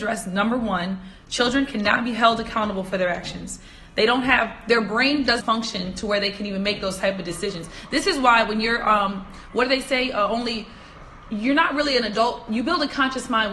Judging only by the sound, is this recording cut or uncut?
cut